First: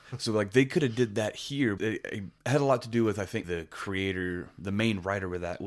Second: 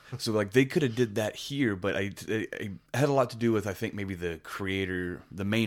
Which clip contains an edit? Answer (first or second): first